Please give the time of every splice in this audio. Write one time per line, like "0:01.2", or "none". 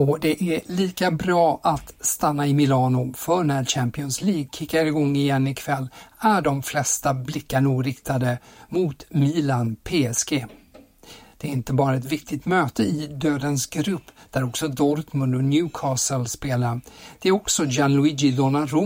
none